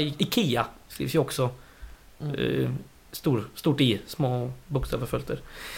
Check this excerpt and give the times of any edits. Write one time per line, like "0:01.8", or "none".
none